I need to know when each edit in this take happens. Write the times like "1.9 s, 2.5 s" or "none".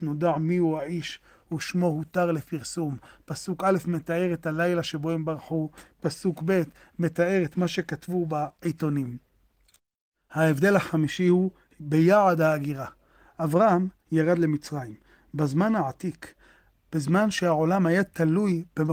none